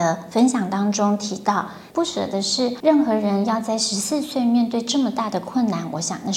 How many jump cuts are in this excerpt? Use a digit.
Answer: 1